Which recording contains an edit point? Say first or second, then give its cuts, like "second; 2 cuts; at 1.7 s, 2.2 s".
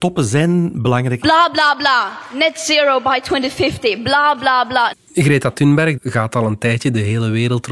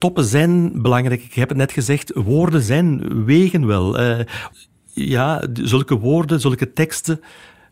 first; 3 cuts; at 1.2 s, 4.9 s, 6.0 s